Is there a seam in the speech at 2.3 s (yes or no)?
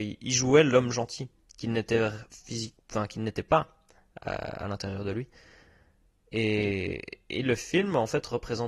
yes